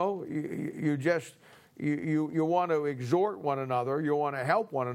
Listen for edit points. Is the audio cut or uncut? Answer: uncut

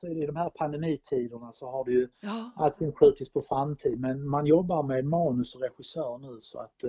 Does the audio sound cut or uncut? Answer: uncut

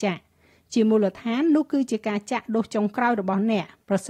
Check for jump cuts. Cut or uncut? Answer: uncut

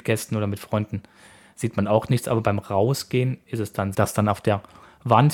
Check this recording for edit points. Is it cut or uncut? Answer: cut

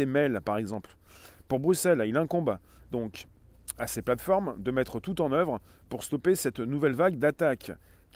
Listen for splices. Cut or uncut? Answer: uncut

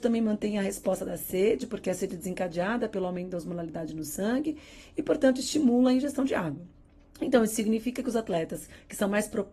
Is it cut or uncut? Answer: uncut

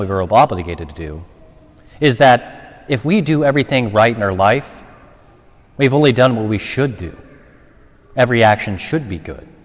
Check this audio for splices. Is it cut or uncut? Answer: uncut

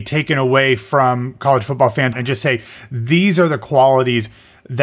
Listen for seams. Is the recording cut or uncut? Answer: cut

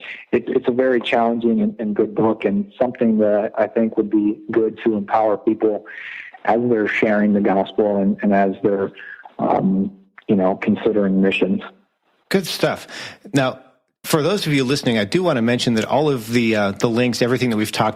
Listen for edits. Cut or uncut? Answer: uncut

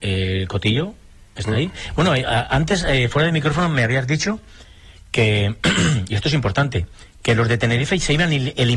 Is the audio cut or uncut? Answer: uncut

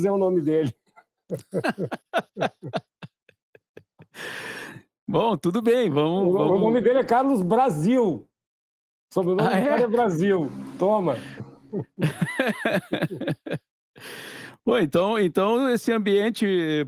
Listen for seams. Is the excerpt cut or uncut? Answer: uncut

